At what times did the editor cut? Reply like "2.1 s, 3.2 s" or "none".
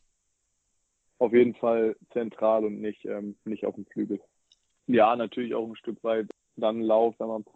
1.1 s, 4.8 s